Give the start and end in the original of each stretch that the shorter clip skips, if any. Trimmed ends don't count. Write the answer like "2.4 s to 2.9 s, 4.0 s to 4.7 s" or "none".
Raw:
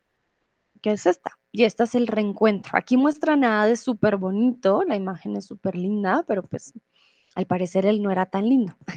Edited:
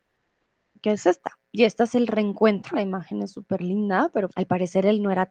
2.7 s to 4.9 s, 6.4 s to 7.3 s